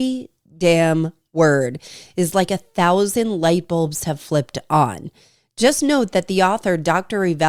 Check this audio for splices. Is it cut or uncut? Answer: uncut